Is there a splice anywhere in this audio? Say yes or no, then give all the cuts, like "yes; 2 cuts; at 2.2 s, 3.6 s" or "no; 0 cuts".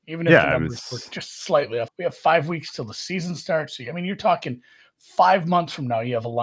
yes; 1 cut; at 1.9 s